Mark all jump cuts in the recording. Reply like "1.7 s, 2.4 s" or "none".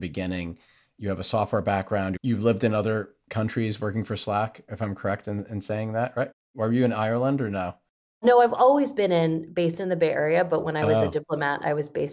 2.2 s